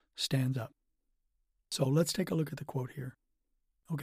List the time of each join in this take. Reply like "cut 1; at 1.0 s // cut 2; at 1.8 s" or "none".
none